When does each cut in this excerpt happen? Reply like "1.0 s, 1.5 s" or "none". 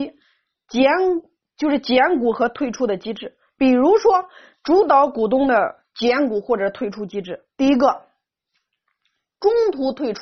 none